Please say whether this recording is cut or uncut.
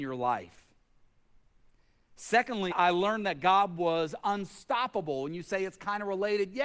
cut